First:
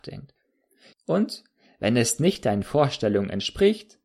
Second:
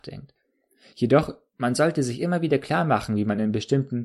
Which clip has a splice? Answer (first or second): first